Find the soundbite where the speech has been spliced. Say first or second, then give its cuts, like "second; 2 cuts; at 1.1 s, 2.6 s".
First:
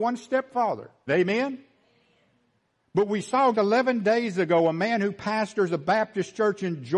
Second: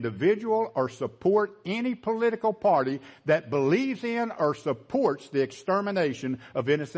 first; 2 cuts; at 1.1 s, 3.5 s